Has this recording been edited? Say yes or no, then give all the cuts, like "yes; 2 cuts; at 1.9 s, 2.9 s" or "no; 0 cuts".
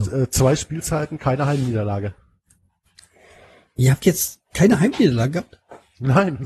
no; 0 cuts